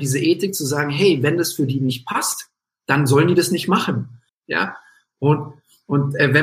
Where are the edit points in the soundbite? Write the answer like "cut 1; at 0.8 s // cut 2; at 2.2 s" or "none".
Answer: cut 1; at 4.3 s